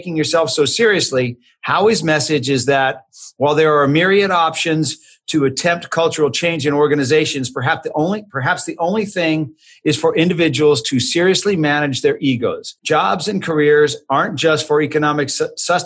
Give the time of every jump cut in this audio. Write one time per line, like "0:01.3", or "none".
0:12.8

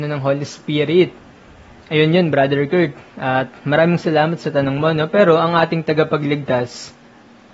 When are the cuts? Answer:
none

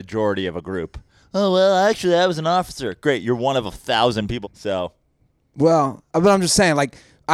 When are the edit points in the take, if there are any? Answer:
0:04.4

